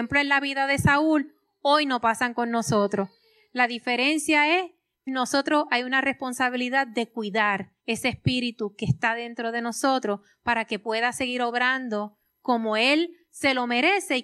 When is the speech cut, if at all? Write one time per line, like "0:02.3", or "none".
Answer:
0:05.1
0:07.8